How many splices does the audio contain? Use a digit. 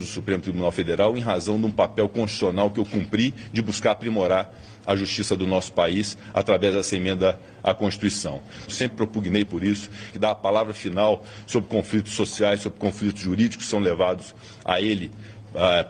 2